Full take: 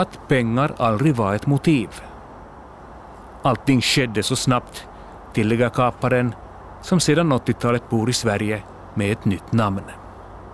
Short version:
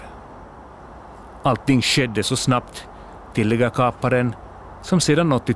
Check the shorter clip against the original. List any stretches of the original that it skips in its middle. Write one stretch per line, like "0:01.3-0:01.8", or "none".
none